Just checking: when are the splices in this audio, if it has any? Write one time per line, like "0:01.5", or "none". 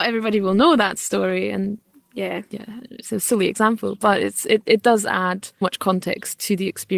0:05.6

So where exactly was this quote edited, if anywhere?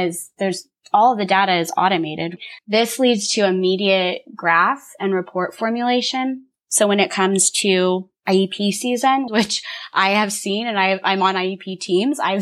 0:02.6
0:09.3

